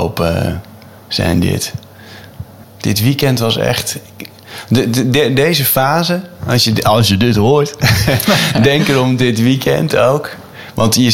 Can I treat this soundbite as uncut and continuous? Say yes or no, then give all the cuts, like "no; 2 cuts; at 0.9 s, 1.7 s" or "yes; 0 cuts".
no; 1 cut; at 2.6 s